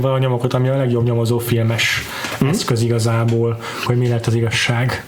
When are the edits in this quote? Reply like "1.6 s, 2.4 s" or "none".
3.9 s